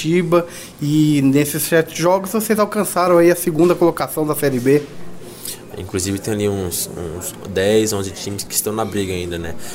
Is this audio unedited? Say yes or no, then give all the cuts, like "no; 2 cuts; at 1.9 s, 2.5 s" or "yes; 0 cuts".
no; 1 cut; at 5.7 s